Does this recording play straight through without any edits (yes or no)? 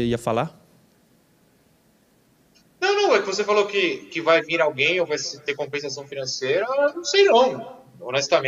yes